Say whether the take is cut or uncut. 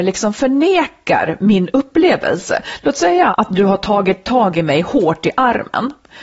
cut